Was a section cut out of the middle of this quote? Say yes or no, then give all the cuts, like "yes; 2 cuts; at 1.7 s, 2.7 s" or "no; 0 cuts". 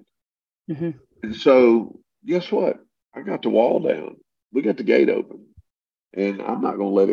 no; 0 cuts